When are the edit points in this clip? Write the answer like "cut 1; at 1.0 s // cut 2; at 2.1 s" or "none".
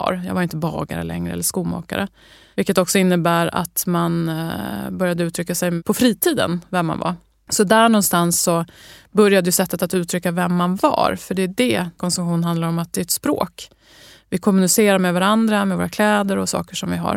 cut 1; at 7.3 s

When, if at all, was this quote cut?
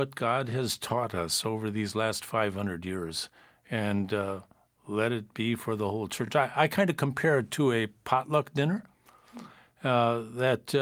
none

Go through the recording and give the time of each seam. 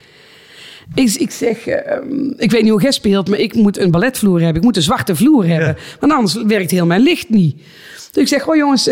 none

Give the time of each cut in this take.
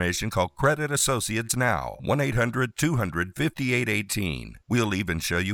none

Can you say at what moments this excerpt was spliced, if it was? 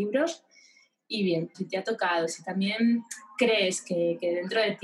cut 1; at 1.5 s

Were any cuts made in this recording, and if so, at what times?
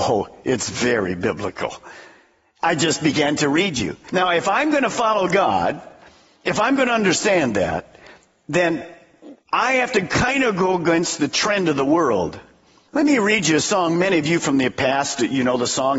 cut 1; at 9.4 s

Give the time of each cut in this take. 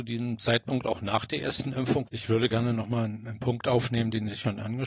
cut 1; at 2.1 s

